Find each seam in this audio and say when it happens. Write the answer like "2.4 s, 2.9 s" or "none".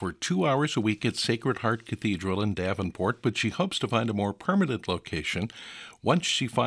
none